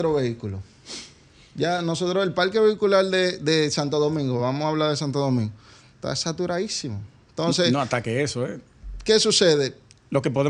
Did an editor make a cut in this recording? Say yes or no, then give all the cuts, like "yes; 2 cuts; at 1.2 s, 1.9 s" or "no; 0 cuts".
no; 0 cuts